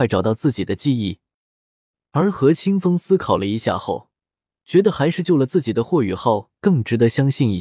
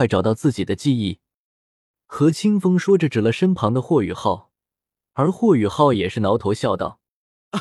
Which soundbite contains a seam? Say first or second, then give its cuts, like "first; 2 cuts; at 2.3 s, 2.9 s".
second; 1 cut; at 1.4 s